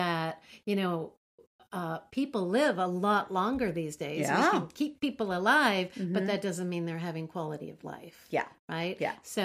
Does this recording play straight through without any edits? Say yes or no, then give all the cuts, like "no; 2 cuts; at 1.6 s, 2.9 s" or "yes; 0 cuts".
yes; 0 cuts